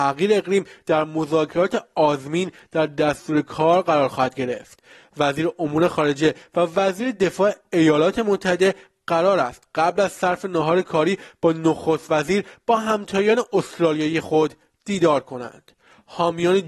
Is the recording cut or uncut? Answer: uncut